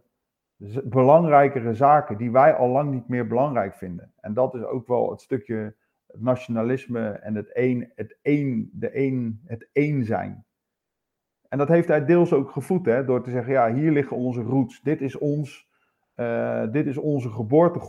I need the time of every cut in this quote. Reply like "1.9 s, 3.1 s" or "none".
none